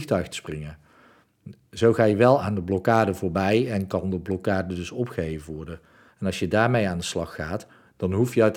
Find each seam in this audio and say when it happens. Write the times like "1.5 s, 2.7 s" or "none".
6.1 s